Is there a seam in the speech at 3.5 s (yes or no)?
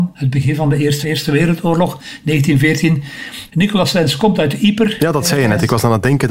yes